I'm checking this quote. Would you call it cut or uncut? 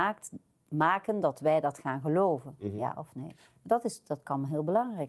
uncut